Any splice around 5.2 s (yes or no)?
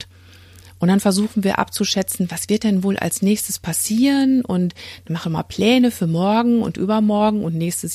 yes